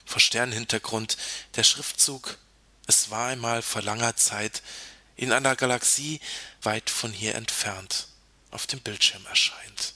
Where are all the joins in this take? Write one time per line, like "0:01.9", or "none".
0:06.6